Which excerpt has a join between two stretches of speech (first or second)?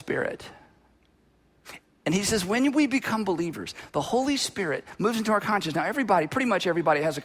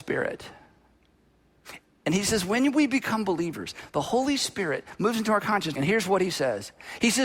second